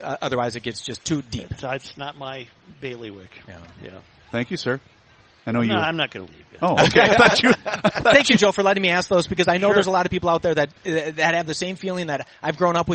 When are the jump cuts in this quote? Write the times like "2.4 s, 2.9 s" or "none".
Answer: none